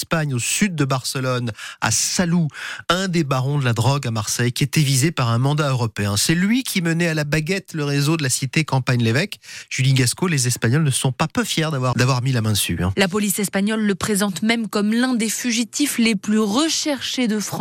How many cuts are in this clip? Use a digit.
1